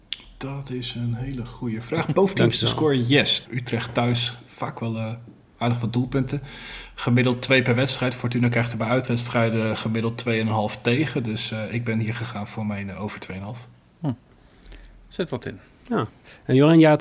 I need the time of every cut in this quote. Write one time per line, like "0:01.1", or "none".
0:03.5